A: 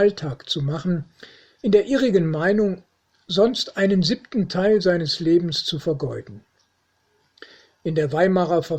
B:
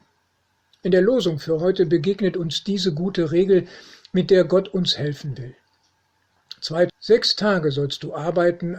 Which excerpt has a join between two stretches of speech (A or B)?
B